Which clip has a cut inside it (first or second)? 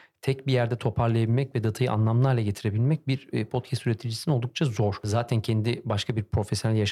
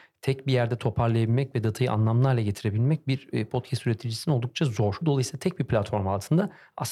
second